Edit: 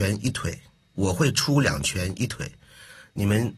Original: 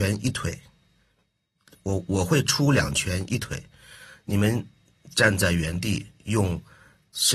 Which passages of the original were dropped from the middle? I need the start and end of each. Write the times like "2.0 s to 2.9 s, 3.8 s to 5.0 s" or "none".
0.9 s to 2.1 s